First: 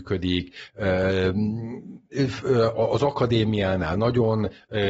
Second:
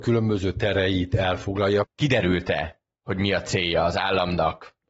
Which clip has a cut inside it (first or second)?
second